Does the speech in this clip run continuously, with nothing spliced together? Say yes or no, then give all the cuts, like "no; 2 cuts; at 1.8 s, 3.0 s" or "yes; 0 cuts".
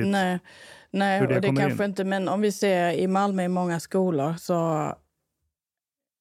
yes; 0 cuts